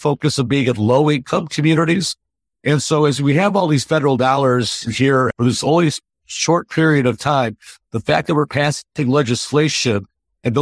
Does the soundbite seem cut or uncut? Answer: uncut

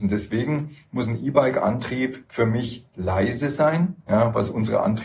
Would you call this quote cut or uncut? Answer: cut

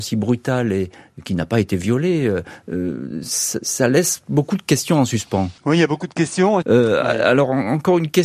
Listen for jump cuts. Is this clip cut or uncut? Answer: cut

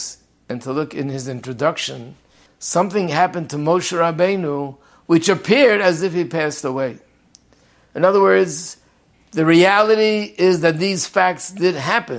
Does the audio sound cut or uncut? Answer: cut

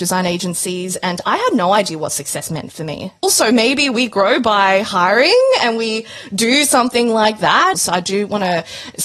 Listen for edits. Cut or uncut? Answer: cut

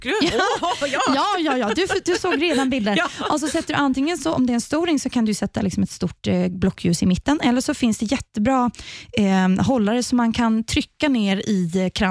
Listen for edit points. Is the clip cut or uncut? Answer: uncut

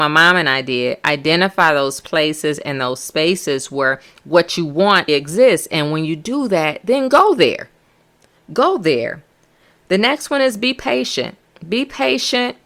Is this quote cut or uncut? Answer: cut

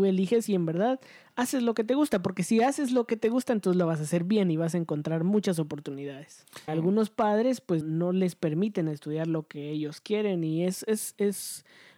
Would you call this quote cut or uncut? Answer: cut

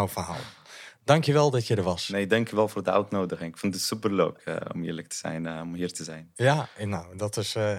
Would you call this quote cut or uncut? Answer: uncut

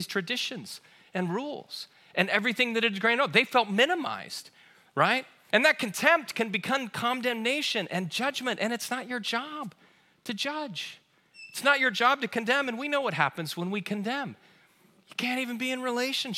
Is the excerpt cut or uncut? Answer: cut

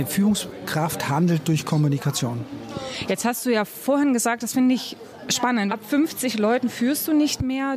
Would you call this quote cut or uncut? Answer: cut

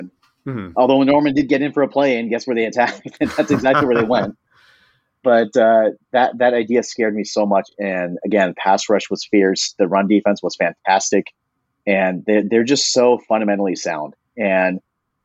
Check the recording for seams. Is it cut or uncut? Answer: uncut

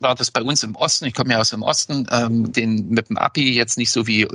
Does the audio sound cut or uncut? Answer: cut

